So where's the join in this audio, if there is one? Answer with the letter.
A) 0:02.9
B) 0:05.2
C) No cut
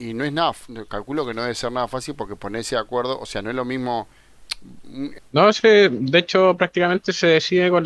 B